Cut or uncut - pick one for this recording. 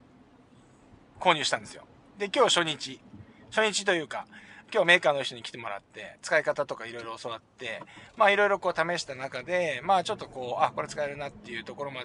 uncut